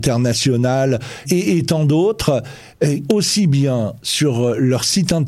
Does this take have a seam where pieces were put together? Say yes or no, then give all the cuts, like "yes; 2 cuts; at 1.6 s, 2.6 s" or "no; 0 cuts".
yes; 2 cuts; at 1.2 s, 3.1 s